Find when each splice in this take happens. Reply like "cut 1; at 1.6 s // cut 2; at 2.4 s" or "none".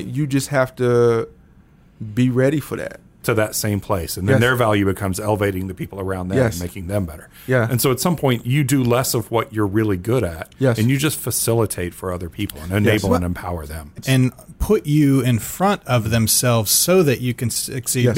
cut 1; at 3.2 s // cut 2; at 14.0 s